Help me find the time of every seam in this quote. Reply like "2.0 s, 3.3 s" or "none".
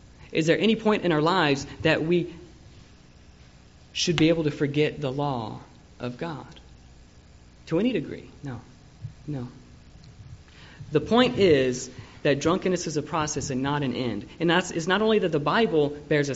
8.4 s